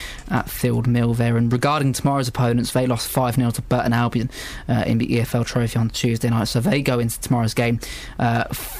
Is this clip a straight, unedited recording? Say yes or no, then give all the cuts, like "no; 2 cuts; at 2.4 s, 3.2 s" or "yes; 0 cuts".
yes; 0 cuts